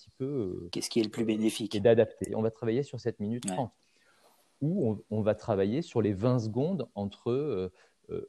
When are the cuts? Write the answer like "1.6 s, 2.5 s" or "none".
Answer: 2.3 s